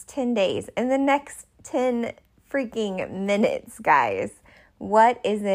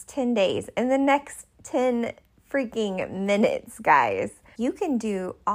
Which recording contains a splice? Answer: second; 1 cut; at 4.5 s

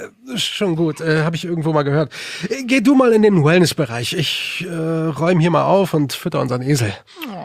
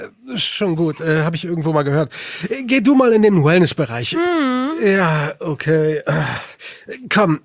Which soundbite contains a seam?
second; 1 cut; at 4.1 s

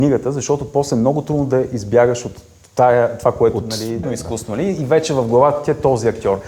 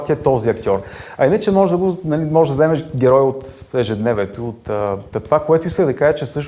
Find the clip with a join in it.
first; 1 cut; at 4.0 s

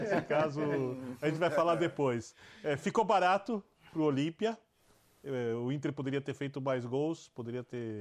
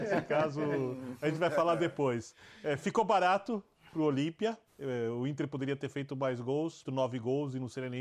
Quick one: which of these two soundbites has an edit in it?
second; 2 cuts; at 4.7 s, 6.8 s

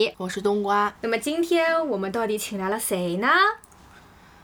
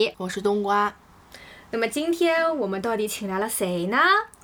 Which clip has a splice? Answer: first; 1 cut; at 1.0 s

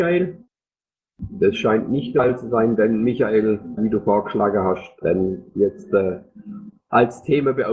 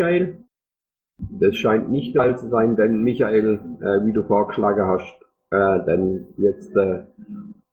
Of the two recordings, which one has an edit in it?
first; 2 cuts; at 3.8 s, 5.0 s

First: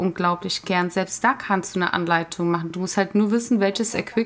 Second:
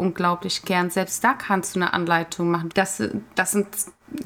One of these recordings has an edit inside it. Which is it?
second; 1 cut; at 2.7 s

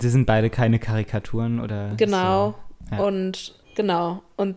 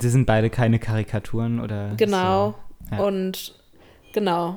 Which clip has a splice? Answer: first; 1 cut; at 3.6 s

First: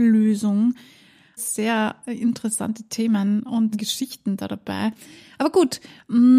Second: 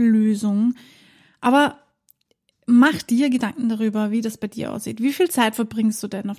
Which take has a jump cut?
first; 2 cuts; at 1.4 s, 3.7 s

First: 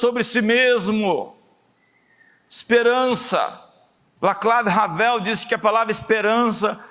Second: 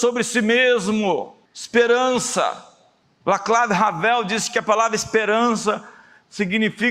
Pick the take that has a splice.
second; 1 cut; at 1.5 s

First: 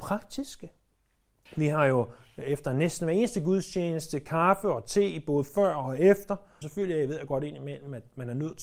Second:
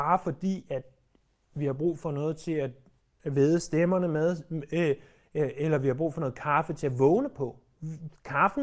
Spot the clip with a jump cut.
first; 2 cuts; at 1.5 s, 6.6 s

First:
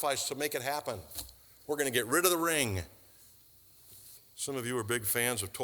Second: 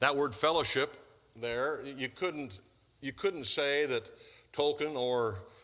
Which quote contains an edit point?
first; 2 cuts; at 1.6 s, 4.2 s

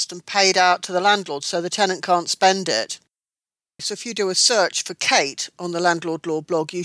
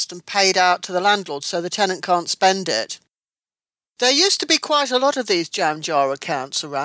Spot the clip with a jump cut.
first; 1 cut; at 3.8 s

